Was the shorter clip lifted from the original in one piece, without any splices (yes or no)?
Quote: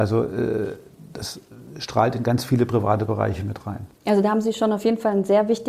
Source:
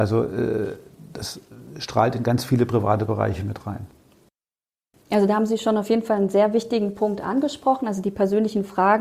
no